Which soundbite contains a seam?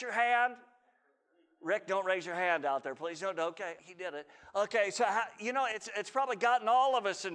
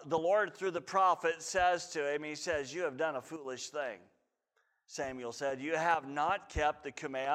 first; 1 cut; at 3.8 s

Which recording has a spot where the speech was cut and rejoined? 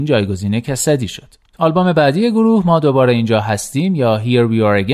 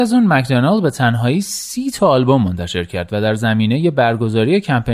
first; 1 cut; at 1.5 s

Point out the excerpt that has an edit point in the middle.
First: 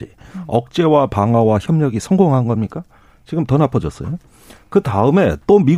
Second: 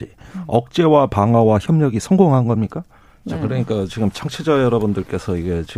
second; 1 cut; at 3.2 s

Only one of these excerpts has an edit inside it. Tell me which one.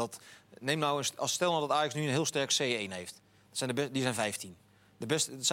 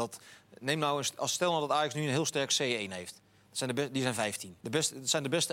second; 1 cut; at 4.6 s

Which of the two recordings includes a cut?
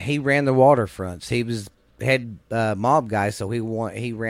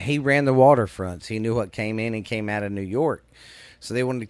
second; 1 cut; at 1.2 s

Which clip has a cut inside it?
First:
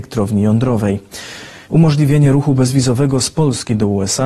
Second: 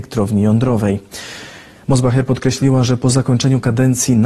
first; 1 cut; at 1.7 s

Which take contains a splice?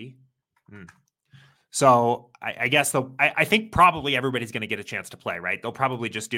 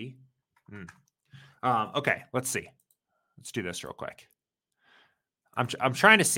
first; 1 cut; at 1.5 s

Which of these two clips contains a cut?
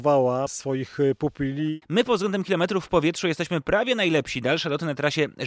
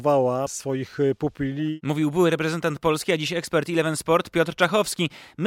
first; 1 cut; at 1.8 s

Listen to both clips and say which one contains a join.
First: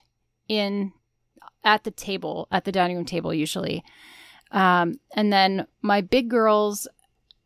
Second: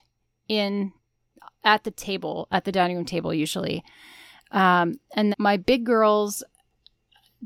second; 1 cut; at 5.3 s

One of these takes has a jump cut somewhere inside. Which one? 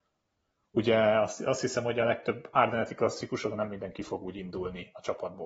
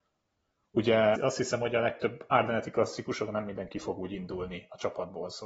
second; 1 cut; at 1.1 s

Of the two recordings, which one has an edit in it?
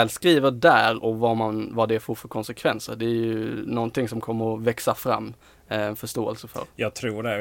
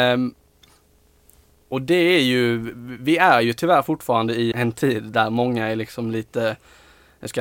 second; 1 cut; at 4.5 s

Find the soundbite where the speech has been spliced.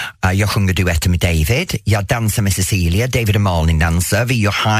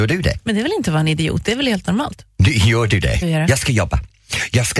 second; 1 cut; at 3.2 s

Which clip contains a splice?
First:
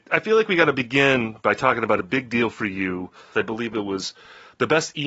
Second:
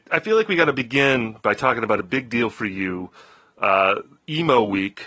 first; 1 cut; at 3.3 s

